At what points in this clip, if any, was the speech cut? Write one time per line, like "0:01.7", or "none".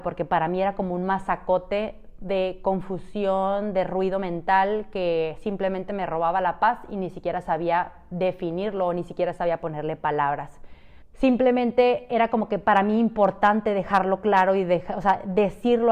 0:11.0